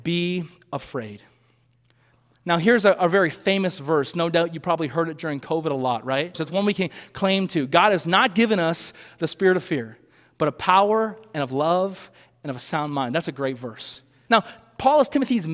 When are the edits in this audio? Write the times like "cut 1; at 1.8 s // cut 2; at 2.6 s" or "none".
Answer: cut 1; at 6.3 s // cut 2; at 14.3 s